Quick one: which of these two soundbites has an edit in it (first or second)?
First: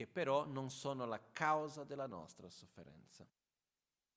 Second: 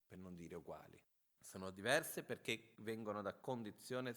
second